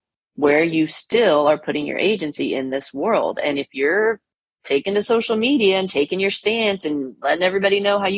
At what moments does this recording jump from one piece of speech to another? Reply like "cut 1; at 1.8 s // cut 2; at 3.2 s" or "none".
none